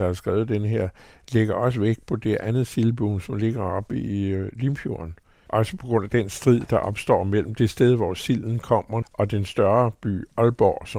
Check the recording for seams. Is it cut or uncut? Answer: cut